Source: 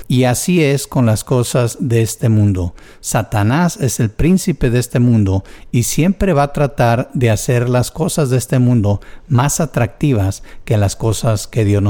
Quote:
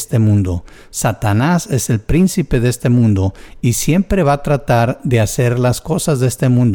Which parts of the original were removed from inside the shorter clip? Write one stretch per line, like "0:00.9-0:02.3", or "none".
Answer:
none